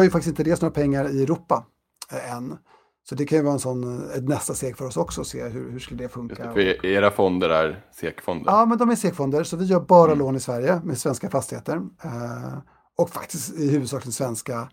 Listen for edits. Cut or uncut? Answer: uncut